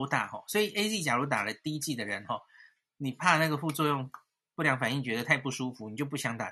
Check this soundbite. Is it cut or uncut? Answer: uncut